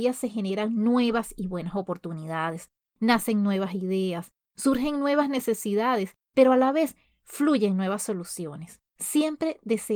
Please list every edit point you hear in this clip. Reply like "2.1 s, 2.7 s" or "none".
8.9 s